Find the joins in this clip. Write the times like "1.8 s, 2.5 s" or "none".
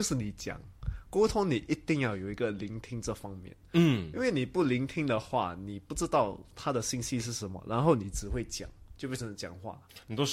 none